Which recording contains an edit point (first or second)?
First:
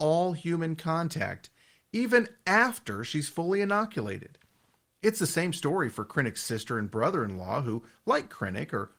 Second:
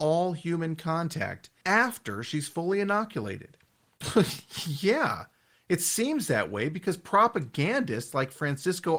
second